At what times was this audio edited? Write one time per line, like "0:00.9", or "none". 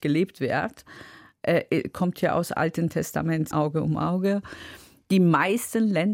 0:03.5